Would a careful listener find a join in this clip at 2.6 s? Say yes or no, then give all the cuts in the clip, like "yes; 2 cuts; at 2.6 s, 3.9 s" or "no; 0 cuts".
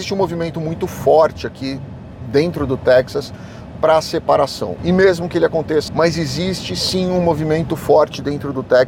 no; 3 cuts; at 4.8 s, 5.9 s, 7.7 s